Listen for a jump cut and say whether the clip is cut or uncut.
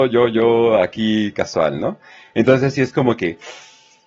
uncut